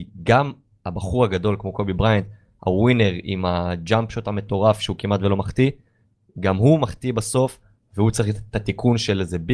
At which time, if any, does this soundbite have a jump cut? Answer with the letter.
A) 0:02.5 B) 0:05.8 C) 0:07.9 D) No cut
D